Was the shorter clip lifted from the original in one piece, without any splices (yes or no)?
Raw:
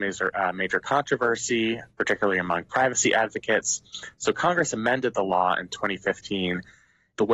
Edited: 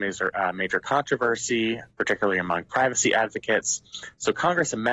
yes